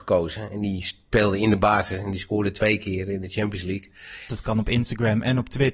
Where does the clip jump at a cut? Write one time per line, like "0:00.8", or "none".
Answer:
0:04.3